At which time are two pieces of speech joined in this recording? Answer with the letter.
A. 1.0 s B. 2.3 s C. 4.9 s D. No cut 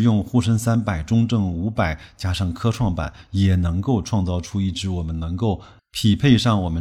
D